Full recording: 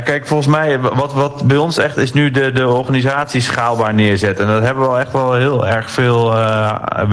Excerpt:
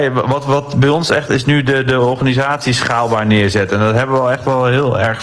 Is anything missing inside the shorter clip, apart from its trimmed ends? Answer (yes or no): no